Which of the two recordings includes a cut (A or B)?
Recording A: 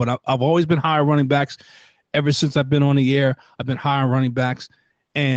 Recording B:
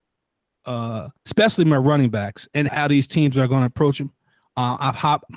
B